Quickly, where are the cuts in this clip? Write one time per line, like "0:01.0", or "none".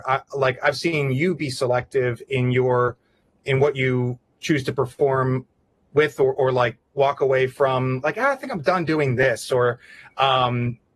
none